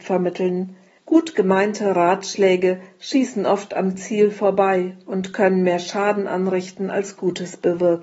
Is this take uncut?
no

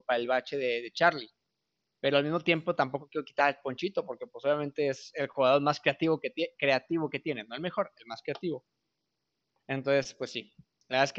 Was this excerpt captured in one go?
yes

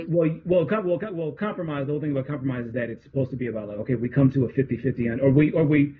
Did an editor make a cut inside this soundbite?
no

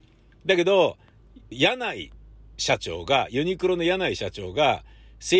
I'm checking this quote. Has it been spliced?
yes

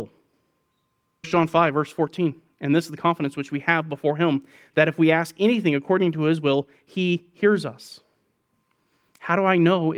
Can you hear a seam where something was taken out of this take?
no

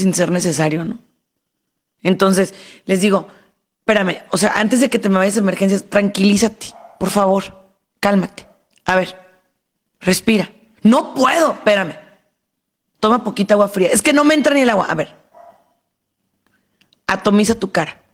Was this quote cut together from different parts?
no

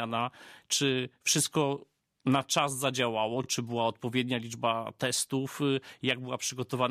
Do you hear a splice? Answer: no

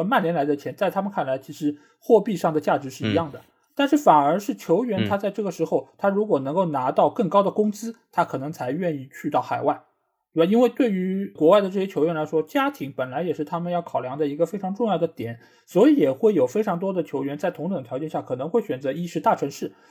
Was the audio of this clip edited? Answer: no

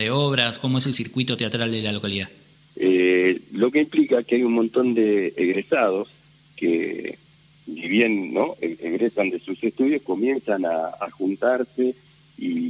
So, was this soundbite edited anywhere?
yes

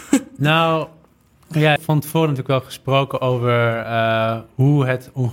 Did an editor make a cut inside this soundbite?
yes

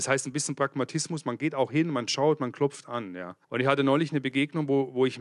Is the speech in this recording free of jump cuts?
no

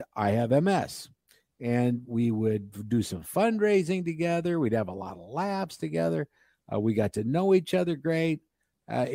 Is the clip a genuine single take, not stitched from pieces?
yes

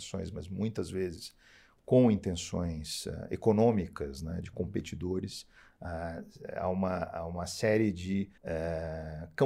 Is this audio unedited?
no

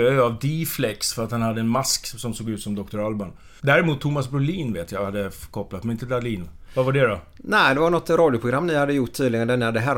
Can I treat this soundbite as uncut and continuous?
no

